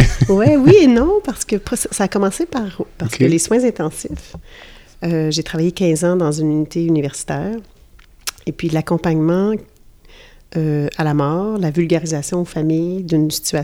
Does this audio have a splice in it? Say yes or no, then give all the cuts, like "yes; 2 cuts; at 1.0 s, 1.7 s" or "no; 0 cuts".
yes; 1 cut; at 3.0 s